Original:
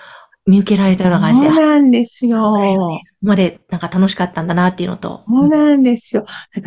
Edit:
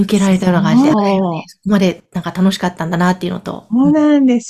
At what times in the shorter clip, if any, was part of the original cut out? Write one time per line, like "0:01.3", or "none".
0:00.9